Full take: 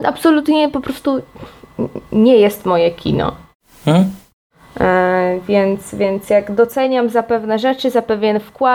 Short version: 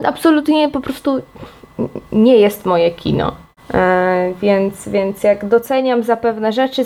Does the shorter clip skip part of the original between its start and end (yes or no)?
yes